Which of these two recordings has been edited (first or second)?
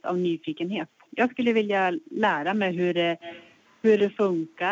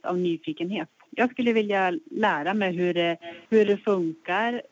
second